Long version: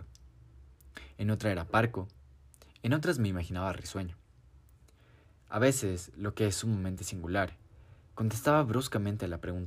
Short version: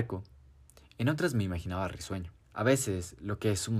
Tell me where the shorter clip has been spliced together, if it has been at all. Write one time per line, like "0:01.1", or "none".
0:02.4